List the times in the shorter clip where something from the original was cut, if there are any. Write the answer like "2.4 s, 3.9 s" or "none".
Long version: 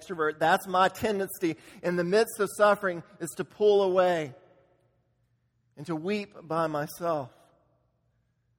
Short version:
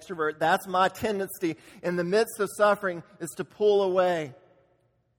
none